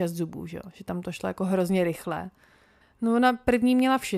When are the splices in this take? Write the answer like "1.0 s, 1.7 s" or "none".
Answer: 2.8 s